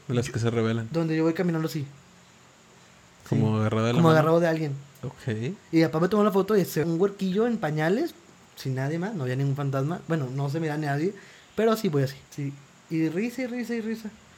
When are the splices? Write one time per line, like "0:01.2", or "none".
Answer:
0:06.8
0:12.3